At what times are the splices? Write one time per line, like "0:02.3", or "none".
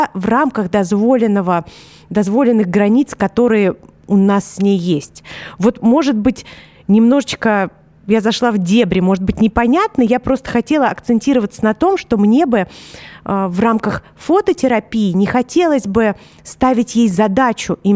none